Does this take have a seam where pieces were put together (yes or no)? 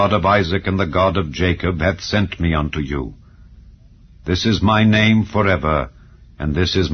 no